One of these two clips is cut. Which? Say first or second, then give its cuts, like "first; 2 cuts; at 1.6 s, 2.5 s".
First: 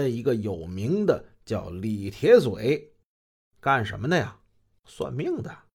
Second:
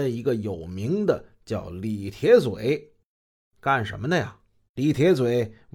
second; 1 cut; at 4.7 s